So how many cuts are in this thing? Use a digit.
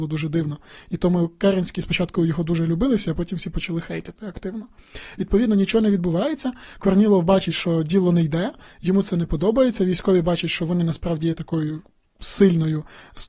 0